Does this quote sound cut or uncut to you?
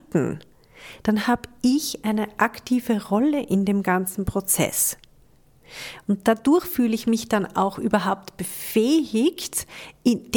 uncut